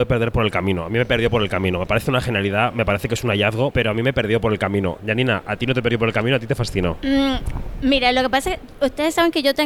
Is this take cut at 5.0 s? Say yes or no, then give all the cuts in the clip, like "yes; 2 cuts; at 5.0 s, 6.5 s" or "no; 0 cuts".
yes; 2 cuts; at 3.7 s, 5.0 s